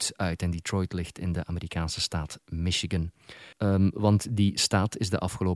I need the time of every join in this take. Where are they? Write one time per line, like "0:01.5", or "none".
0:03.5